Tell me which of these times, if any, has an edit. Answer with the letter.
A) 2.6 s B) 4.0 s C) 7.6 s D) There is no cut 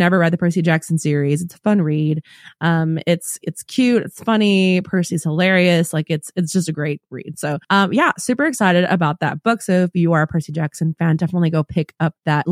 D